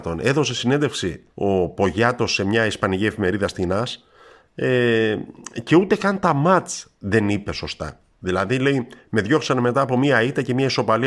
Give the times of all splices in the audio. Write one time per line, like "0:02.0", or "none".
0:01.3